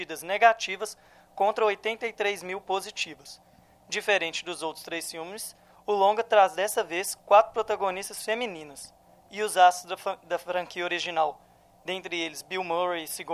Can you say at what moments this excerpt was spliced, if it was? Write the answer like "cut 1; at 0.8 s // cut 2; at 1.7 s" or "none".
none